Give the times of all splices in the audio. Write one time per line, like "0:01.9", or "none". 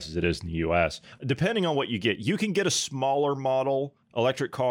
none